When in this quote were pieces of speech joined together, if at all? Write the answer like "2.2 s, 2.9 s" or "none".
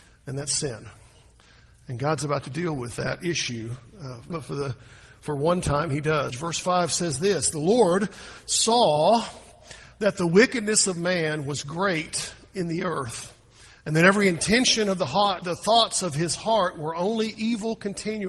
4.3 s, 6.3 s, 15.4 s